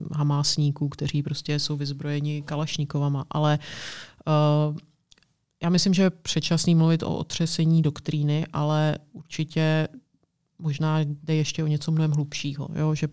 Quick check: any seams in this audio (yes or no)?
no